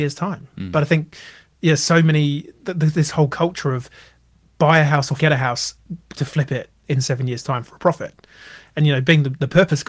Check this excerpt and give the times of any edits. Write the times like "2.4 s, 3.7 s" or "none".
5.2 s